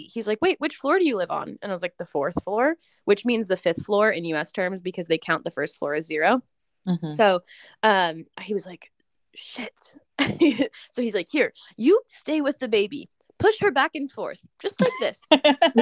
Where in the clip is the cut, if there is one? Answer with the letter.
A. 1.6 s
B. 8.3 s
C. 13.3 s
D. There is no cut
D